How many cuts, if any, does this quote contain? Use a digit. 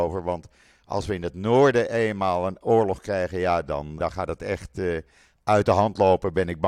1